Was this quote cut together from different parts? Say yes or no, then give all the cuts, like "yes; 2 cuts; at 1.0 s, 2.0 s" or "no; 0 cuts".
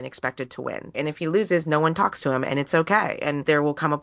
yes; 1 cut; at 0.9 s